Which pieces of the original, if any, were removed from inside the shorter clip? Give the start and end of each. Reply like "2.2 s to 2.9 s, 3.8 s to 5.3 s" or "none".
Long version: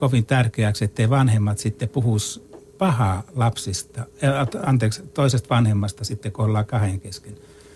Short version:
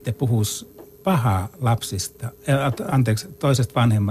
none